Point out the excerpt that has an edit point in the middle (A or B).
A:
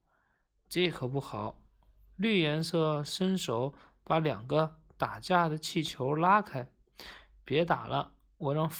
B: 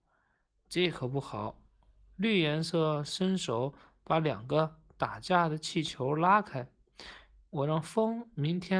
B